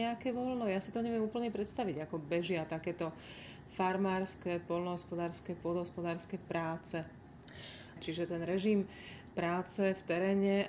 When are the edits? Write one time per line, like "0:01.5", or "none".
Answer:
0:08.0